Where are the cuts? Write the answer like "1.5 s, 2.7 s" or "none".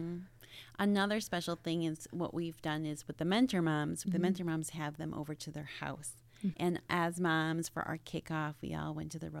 4.0 s, 6.5 s